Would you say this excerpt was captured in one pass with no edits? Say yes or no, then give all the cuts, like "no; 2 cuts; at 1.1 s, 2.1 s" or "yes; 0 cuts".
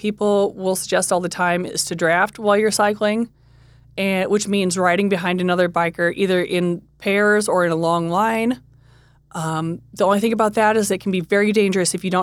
yes; 0 cuts